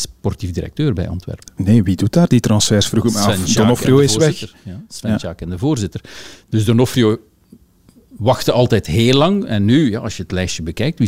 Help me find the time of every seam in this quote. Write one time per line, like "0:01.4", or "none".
none